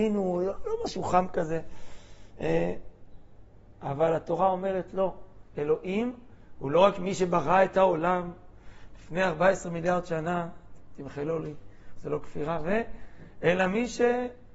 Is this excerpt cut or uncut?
uncut